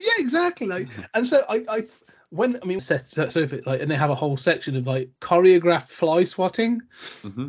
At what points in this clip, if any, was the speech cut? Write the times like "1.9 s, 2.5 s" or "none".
2.8 s, 5.2 s